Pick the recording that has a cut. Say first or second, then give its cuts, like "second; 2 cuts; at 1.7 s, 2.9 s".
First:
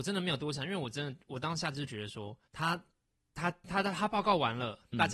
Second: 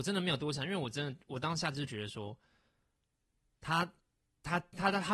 first; 1 cut; at 2.5 s